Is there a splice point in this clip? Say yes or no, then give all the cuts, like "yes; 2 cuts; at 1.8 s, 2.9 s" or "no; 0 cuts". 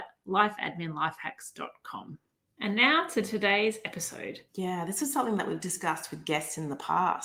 yes; 2 cuts; at 2.5 s, 4.5 s